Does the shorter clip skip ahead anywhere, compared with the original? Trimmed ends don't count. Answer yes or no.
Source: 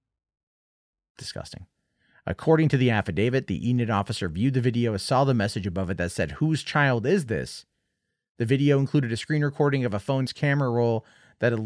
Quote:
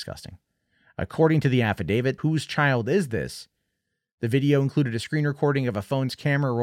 yes